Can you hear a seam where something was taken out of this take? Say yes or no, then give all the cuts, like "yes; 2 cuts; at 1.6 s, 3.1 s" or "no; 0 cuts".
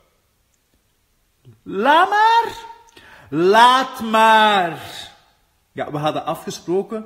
no; 0 cuts